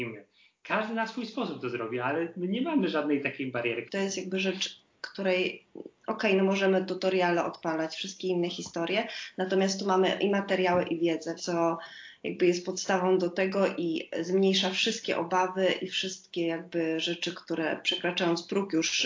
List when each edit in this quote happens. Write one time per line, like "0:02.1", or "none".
0:03.9
0:11.4